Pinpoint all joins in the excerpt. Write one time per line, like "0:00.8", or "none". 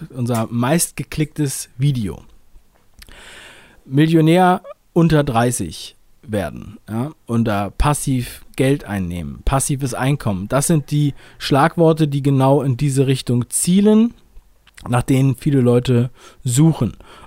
none